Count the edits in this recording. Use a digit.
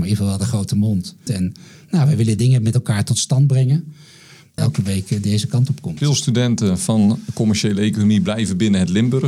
2